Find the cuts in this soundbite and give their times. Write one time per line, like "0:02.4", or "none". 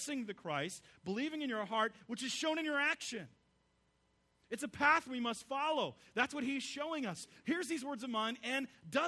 0:07.4